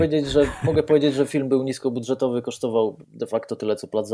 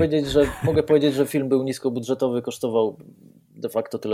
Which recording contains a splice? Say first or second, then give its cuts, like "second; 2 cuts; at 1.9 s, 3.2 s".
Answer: first; 1 cut; at 3.0 s